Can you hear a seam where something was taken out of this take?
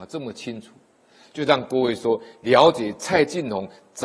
no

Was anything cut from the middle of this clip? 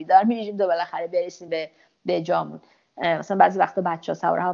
no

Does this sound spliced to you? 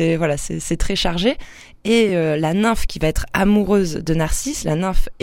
no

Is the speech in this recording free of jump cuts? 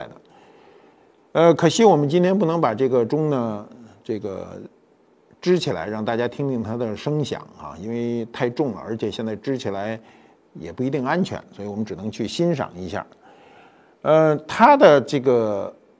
yes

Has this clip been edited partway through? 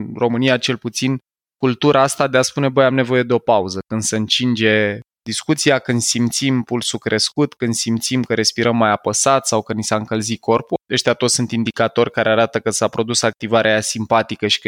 no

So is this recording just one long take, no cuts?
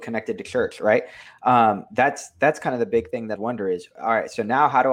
no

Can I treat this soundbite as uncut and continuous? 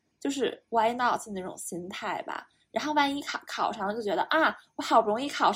yes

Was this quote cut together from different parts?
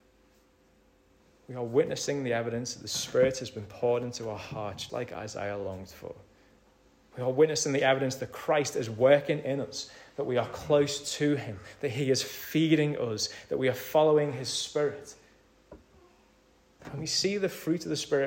yes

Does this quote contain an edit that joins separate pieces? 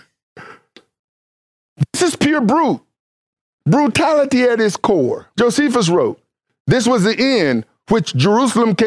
yes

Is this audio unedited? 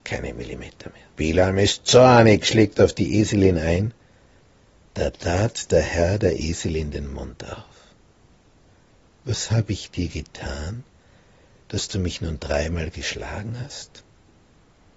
no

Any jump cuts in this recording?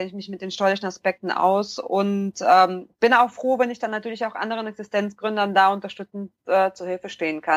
no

